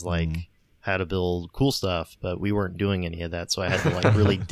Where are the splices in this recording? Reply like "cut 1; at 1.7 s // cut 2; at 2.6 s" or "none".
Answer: none